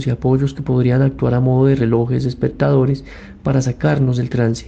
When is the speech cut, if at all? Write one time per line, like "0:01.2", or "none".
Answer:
none